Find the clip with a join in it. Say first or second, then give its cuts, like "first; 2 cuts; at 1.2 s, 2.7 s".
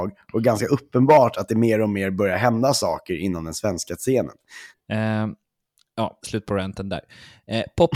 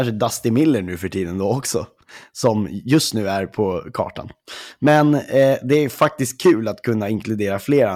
first; 2 cuts; at 4.7 s, 6.2 s